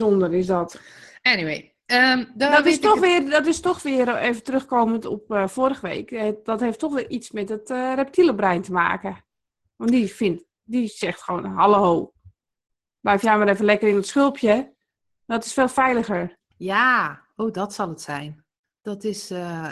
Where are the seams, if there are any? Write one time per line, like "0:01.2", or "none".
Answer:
none